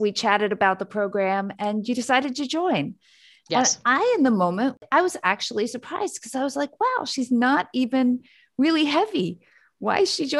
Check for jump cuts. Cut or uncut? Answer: uncut